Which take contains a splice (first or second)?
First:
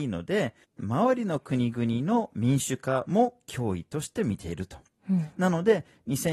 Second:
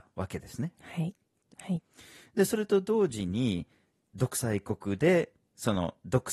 second